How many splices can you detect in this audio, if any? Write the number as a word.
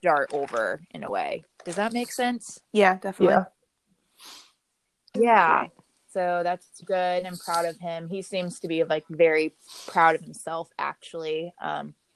two